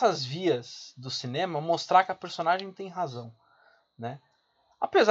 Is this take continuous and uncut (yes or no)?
yes